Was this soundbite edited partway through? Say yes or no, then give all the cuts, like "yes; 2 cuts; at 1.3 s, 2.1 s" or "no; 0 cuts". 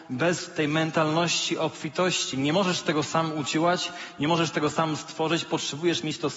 no; 0 cuts